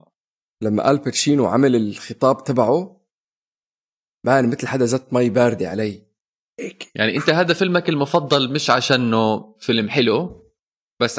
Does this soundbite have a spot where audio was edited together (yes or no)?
no